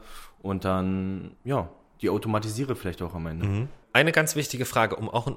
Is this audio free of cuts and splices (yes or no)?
yes